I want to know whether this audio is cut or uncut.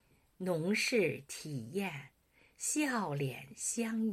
uncut